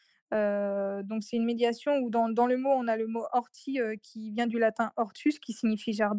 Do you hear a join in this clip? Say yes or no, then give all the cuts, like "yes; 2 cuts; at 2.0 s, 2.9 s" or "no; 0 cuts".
no; 0 cuts